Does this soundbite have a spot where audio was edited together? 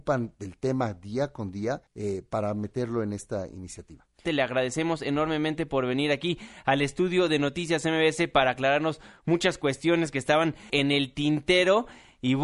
yes; 3 cuts; at 1.9 s, 4.2 s, 10.7 s

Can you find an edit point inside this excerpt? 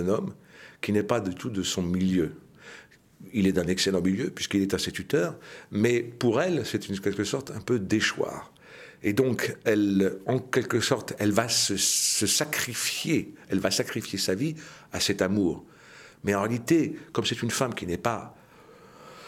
no; 0 cuts

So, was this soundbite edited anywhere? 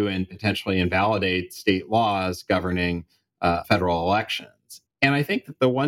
yes; 2 cuts; at 3.6 s, 4.9 s

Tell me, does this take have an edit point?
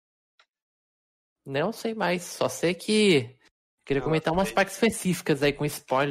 no; 0 cuts

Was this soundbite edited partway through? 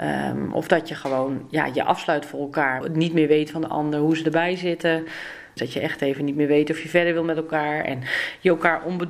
yes; 2 cuts; at 2.8 s, 5.6 s

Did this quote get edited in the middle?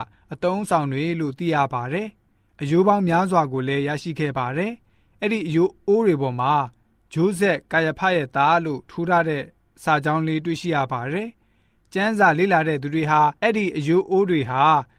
yes; 1 cut; at 13.4 s

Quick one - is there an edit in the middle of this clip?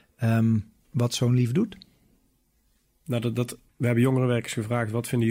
yes; 1 cut; at 3.7 s

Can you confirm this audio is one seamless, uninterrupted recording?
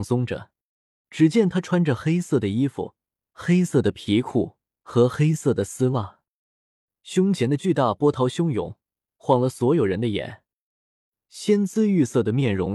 no; 1 cut; at 1.0 s

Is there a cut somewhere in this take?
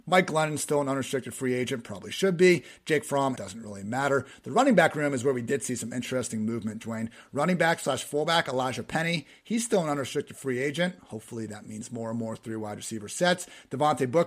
yes; 1 cut; at 3.3 s

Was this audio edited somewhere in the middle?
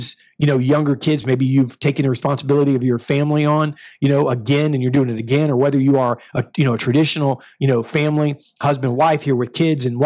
no; 0 cuts

